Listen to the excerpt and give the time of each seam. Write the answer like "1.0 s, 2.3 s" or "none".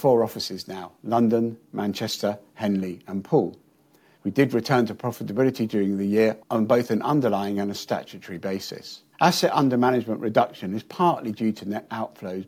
4.1 s, 9.1 s